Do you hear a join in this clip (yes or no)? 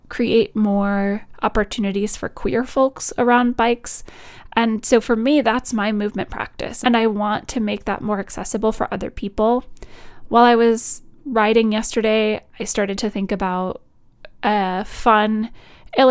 yes